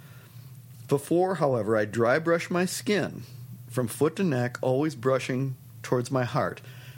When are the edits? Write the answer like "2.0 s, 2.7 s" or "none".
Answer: none